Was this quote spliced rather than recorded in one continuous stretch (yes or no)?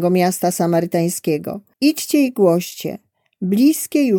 yes